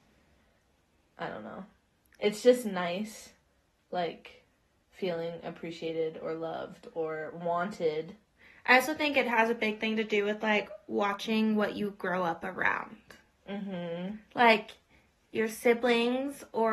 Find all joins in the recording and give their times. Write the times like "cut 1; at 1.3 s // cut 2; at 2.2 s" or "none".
none

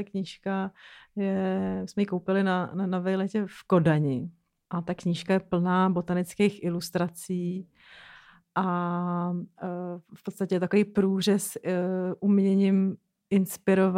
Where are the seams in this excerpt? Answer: none

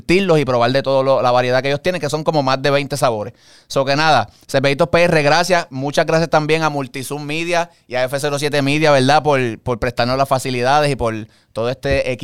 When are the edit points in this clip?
none

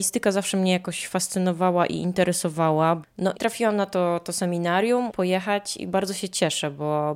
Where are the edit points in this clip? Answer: cut 1; at 3.3 s // cut 2; at 5.1 s

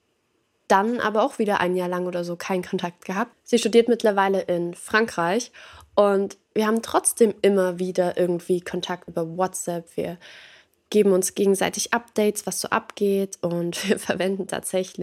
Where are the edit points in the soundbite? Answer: cut 1; at 3.3 s // cut 2; at 9.1 s

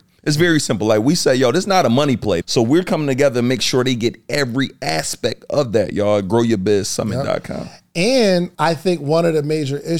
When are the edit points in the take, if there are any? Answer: cut 1; at 2.4 s // cut 2; at 8.6 s

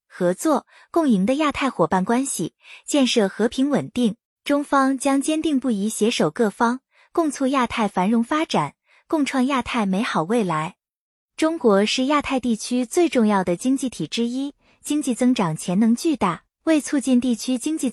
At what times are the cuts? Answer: cut 1; at 4.2 s

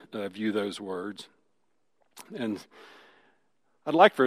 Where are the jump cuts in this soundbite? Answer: cut 1; at 2.3 s

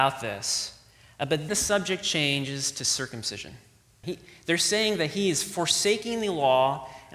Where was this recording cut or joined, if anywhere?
cut 1; at 1.5 s // cut 2; at 4.0 s

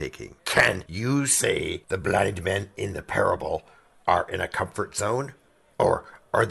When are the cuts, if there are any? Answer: none

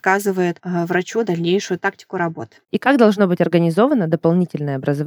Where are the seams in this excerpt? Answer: cut 1; at 2.7 s

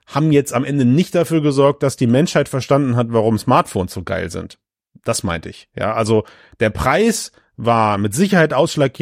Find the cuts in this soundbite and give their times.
none

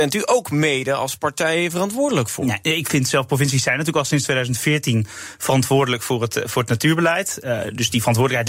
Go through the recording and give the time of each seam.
none

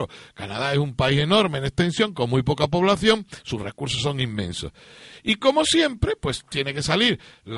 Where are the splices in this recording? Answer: none

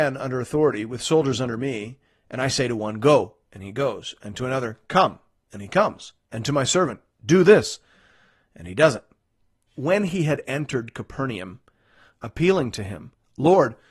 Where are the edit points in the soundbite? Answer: cut 1; at 9.7 s // cut 2; at 12.2 s

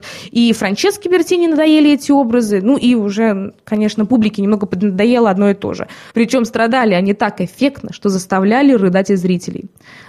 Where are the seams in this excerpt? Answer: cut 1; at 6.1 s

